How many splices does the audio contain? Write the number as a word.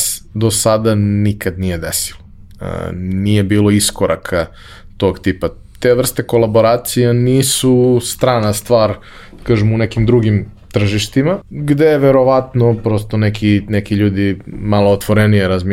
one